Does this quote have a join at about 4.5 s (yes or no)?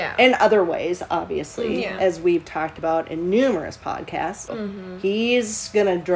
yes